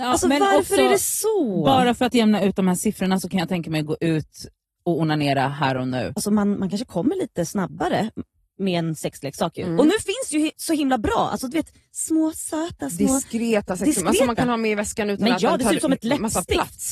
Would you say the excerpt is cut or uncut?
uncut